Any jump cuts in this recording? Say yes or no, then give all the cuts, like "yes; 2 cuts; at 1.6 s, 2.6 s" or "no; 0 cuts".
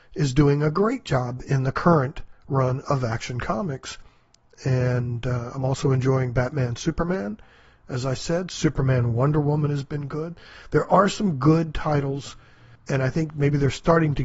no; 0 cuts